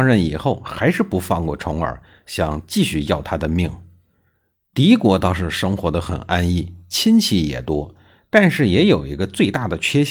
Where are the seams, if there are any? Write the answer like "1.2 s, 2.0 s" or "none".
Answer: none